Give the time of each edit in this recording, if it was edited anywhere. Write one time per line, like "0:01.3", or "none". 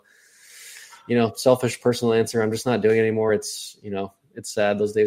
none